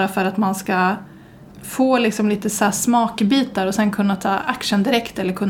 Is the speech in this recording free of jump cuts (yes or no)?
no